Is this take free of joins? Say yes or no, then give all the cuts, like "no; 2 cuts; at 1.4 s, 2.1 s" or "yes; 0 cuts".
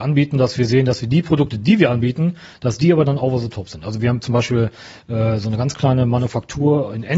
yes; 0 cuts